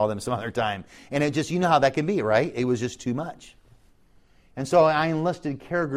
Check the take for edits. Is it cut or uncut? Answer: uncut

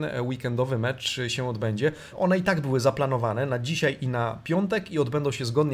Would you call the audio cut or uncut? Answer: cut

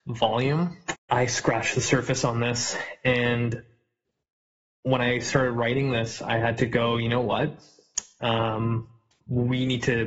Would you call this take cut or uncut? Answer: cut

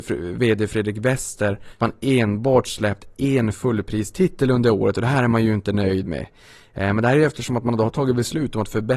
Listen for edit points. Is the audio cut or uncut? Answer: uncut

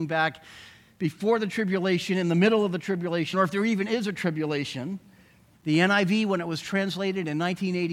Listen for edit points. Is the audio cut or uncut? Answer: cut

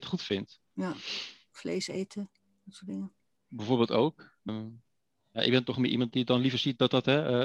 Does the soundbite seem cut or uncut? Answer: cut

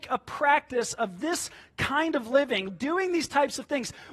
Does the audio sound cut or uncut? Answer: cut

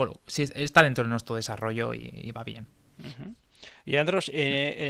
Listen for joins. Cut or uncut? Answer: uncut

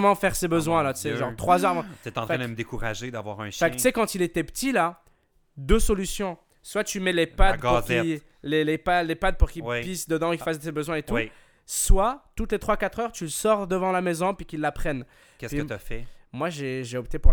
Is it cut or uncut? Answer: cut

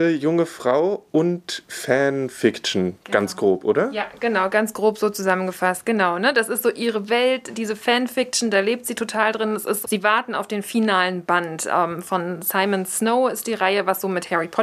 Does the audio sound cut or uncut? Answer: cut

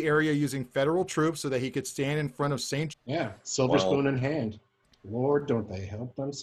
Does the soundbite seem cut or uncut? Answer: cut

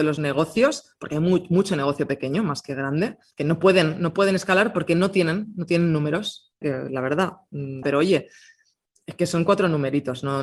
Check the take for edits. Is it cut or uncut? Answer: cut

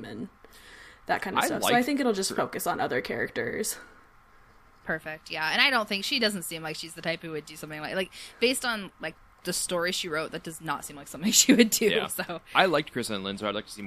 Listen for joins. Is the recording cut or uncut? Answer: uncut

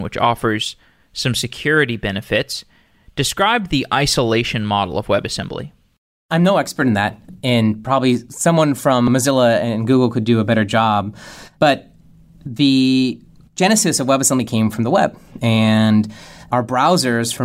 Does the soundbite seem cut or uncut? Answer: uncut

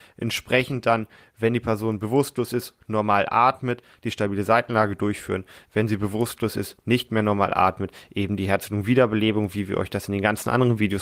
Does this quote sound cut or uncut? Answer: uncut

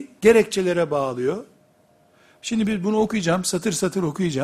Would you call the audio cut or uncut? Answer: uncut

